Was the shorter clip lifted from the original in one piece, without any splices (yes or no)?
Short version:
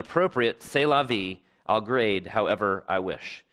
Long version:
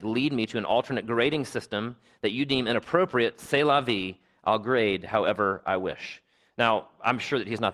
yes